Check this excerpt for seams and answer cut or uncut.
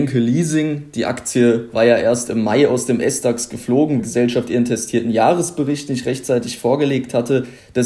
cut